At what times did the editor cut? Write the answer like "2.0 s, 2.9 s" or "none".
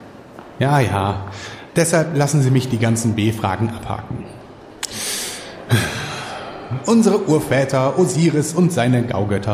1.7 s